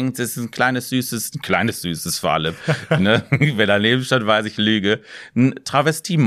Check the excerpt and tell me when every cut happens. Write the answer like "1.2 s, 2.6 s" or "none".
none